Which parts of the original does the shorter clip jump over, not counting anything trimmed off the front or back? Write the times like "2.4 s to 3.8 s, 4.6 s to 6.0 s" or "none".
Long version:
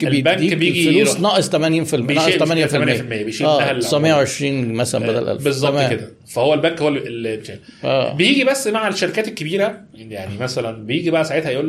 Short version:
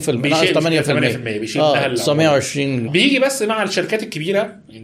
4.7 s to 8.1 s